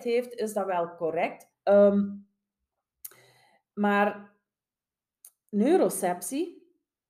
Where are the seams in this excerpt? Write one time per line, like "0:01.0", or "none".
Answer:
0:01.5

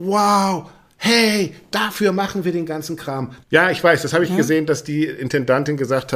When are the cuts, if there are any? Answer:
0:03.4

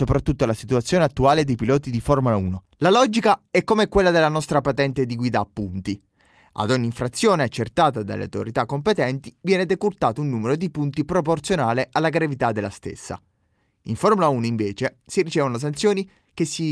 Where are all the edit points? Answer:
0:02.7

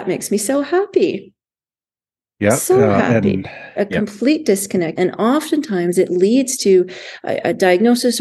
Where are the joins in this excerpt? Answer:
0:03.8
0:05.0

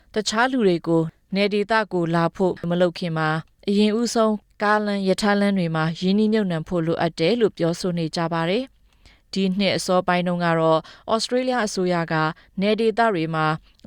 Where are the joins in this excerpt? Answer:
none

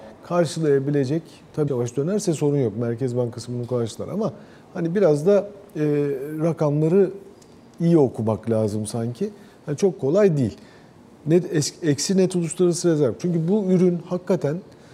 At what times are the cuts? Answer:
0:01.7
0:13.2

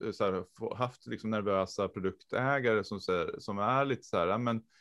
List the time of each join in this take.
none

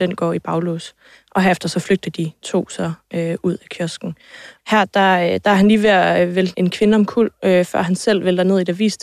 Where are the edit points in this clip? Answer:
0:04.6
0:06.5

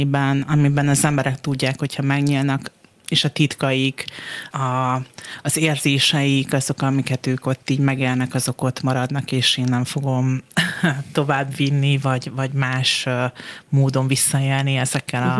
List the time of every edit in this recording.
0:04.5

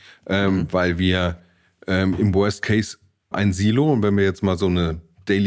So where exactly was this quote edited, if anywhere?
0:03.3

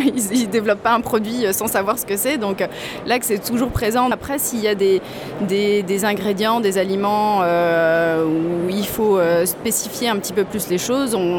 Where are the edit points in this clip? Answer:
0:04.1

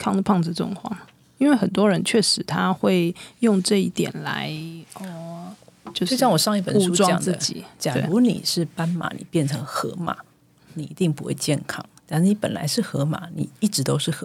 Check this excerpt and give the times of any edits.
none

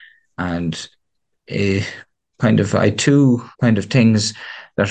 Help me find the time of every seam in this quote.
0:03.5

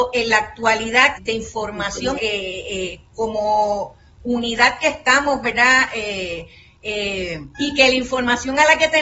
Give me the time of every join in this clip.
0:01.2
0:02.2
0:07.5

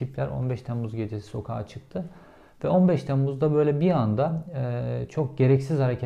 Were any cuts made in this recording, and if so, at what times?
none

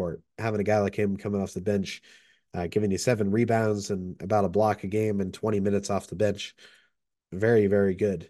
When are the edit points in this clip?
none

